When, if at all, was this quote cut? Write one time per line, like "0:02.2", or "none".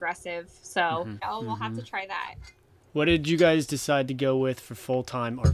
0:01.2